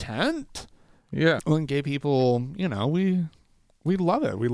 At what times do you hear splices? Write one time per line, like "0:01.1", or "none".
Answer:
0:01.4

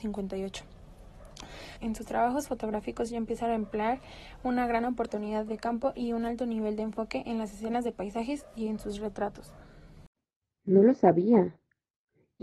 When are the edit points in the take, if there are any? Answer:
0:01.8

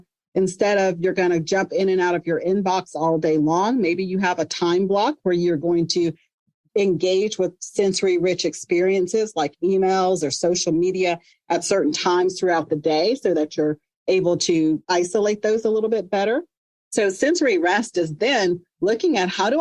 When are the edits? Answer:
0:16.7

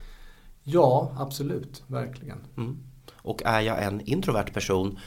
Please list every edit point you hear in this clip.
none

